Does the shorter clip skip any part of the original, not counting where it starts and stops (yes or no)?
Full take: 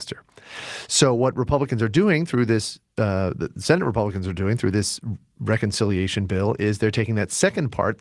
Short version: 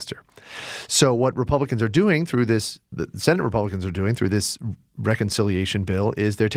yes